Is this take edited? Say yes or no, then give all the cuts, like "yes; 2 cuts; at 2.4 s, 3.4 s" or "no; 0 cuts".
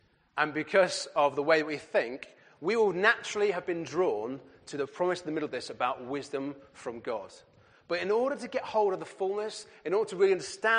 no; 0 cuts